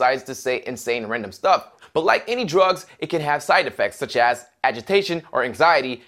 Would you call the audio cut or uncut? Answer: cut